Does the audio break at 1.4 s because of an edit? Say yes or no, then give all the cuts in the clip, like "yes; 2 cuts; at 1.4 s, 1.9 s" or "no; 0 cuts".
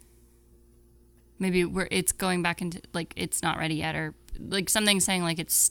yes; 1 cut; at 1.4 s